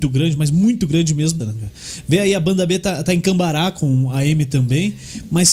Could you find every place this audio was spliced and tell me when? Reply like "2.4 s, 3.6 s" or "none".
1.4 s